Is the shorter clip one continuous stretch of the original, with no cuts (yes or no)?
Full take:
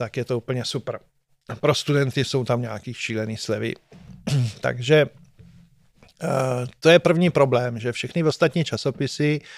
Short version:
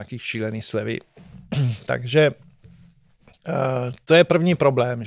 yes